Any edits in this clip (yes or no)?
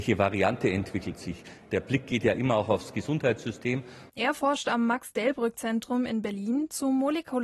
yes